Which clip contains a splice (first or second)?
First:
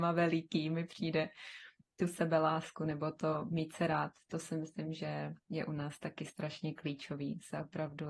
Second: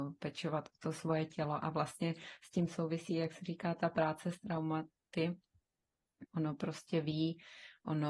second